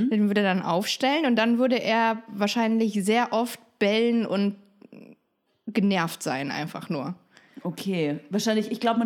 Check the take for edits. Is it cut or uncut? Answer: uncut